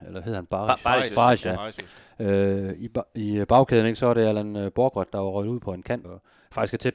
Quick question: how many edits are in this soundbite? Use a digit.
1